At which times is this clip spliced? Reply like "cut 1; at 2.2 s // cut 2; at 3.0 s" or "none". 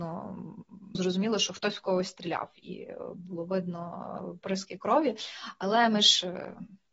cut 1; at 0.9 s